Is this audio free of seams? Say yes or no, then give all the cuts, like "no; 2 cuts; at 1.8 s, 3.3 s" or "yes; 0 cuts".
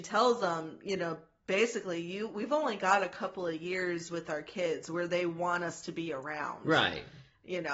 yes; 0 cuts